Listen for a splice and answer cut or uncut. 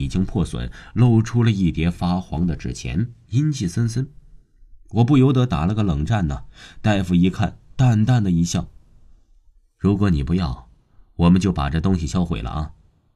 uncut